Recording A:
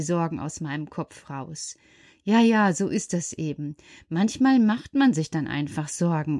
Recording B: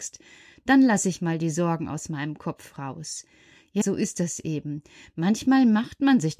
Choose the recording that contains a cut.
B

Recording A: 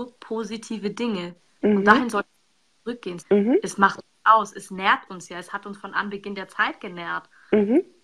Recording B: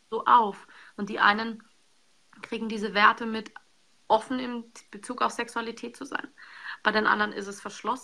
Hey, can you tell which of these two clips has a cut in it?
A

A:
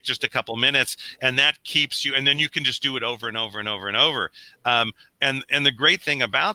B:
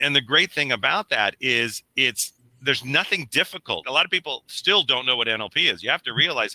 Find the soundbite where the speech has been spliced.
B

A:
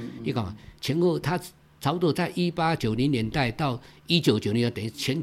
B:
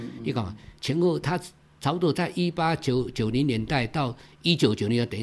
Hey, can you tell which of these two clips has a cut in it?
A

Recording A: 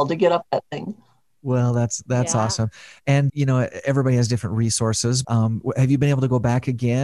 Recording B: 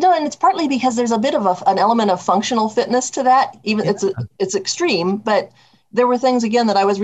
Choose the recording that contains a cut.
A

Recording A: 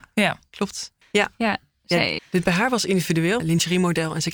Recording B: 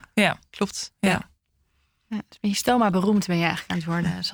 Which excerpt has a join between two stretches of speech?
A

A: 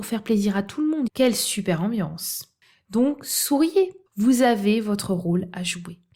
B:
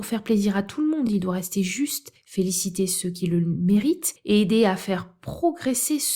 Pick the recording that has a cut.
A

